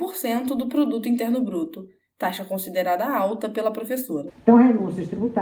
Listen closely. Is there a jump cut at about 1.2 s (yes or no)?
no